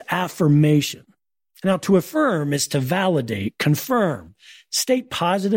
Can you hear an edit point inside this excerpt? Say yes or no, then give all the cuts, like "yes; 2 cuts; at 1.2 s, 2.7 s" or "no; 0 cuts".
no; 0 cuts